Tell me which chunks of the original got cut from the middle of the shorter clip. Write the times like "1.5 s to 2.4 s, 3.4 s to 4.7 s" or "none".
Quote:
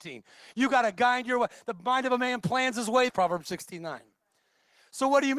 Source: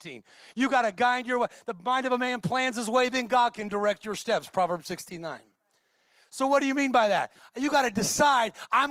3.1 s to 4.5 s